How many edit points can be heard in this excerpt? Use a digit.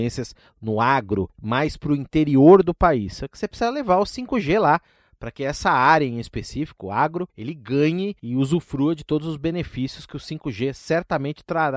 0